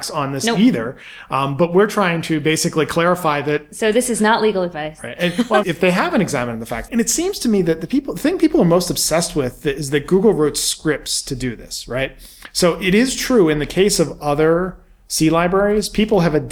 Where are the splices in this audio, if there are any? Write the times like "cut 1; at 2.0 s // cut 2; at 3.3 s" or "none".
cut 1; at 5.6 s // cut 2; at 6.9 s